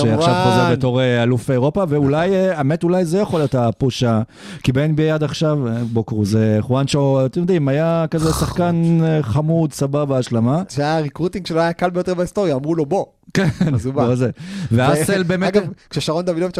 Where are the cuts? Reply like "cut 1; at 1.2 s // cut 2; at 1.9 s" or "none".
cut 1; at 10.7 s